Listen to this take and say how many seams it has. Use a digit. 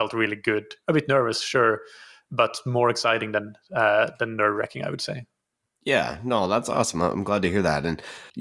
0